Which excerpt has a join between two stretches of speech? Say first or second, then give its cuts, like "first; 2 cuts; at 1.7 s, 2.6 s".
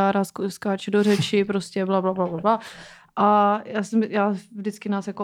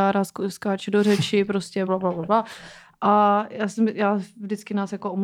second; 1 cut; at 1.9 s